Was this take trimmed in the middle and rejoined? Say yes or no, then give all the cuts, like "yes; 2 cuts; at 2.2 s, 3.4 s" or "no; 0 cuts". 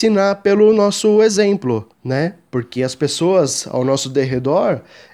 yes; 1 cut; at 1.9 s